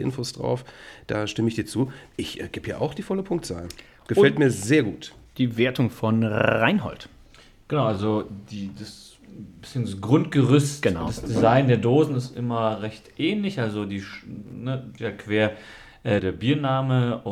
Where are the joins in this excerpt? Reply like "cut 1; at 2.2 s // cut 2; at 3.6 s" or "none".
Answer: cut 1; at 15.0 s // cut 2; at 16.2 s